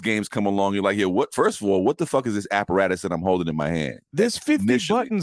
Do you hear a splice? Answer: no; 0 cuts

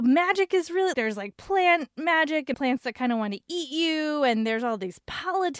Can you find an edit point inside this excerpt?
yes; 2 cuts; at 0.9 s, 2.5 s

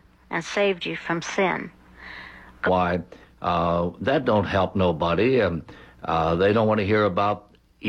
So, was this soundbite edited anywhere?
yes; 1 cut; at 2.7 s

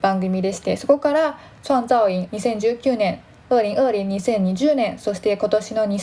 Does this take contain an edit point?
yes; 1 cut; at 2.3 s

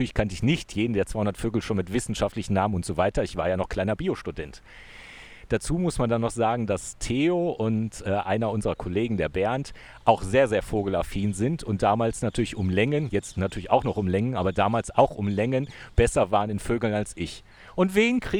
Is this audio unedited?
yes; 0 cuts

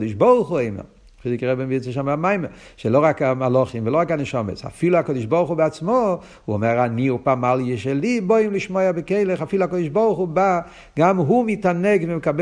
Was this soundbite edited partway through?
no; 0 cuts

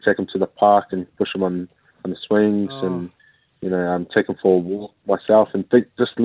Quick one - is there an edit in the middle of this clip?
no; 0 cuts

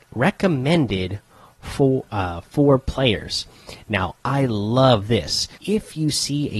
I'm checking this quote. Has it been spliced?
yes; 1 cut; at 5.5 s

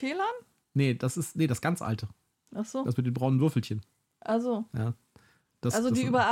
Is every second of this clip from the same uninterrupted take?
yes; 0 cuts

